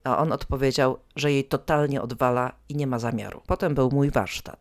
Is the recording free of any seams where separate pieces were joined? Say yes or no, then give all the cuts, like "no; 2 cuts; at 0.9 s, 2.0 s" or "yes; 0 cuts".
no; 1 cut; at 3.4 s